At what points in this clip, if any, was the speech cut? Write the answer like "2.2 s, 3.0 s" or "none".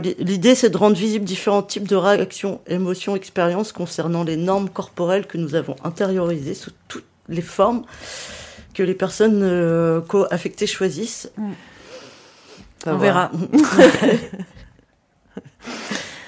11.3 s